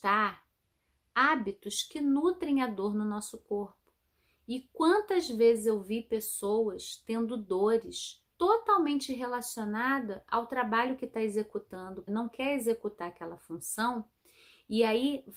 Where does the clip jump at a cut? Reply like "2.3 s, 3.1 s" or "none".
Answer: 8.3 s, 12.1 s